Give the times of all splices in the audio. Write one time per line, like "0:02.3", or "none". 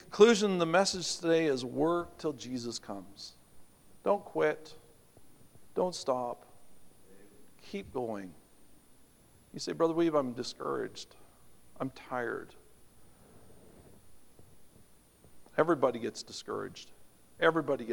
none